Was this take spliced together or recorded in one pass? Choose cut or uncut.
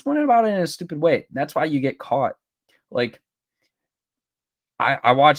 uncut